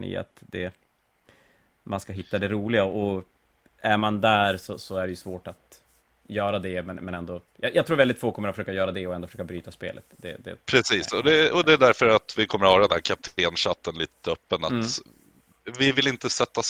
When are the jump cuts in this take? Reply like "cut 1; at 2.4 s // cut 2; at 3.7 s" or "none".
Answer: none